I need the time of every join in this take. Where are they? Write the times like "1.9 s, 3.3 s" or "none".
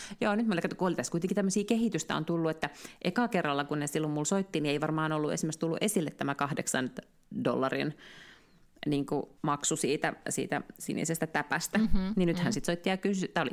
9.4 s